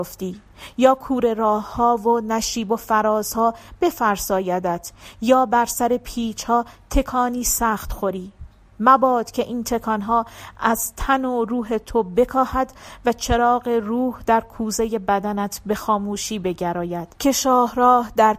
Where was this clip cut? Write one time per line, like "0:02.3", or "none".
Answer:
0:17.1